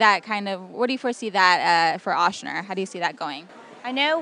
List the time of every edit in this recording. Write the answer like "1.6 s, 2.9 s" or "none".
none